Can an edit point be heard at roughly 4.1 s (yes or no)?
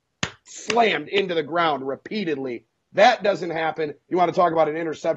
yes